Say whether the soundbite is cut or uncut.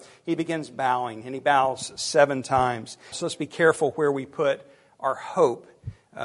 cut